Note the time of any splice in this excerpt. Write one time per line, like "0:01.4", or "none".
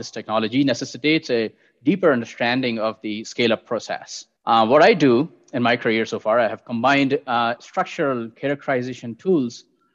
0:04.4
0:07.6